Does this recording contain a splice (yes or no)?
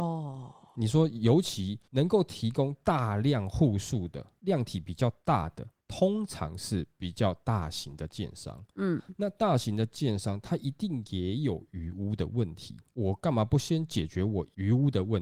no